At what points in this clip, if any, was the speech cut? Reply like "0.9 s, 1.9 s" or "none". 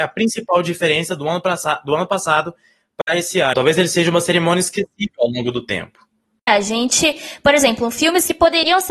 3.5 s, 6.5 s